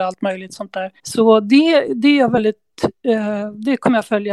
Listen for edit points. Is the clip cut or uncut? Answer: cut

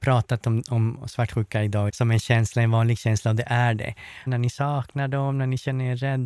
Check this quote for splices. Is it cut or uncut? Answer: cut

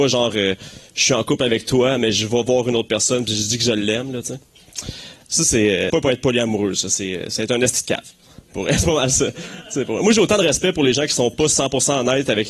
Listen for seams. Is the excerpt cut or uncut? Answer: cut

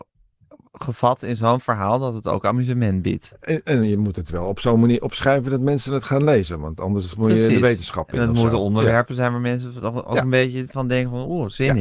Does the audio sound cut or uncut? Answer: uncut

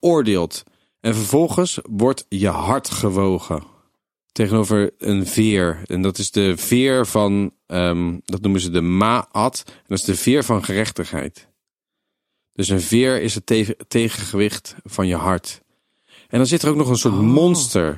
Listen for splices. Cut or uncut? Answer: uncut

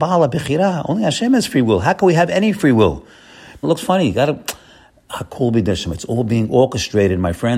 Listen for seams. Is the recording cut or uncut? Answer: cut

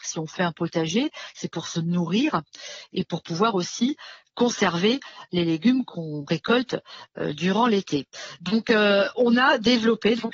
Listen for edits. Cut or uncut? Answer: uncut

